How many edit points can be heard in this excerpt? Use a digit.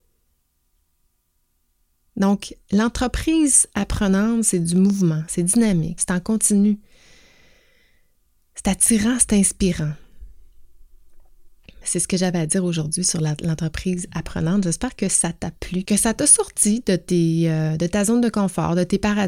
3